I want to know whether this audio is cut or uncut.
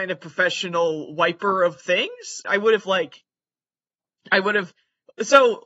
cut